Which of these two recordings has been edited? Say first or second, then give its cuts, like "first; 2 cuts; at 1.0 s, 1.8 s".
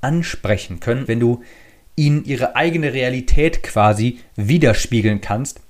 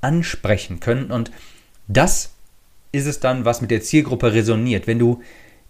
first; 1 cut; at 1.1 s